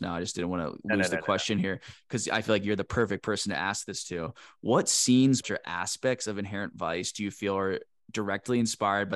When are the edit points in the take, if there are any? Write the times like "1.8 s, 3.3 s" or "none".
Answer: 5.4 s